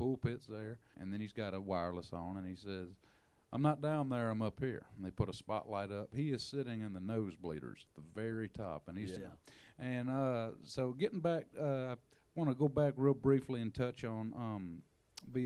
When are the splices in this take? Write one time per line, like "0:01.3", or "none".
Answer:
0:00.9
0:09.2